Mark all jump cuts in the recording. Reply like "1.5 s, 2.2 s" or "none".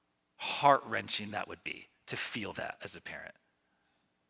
none